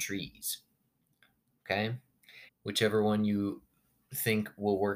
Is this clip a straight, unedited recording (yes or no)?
no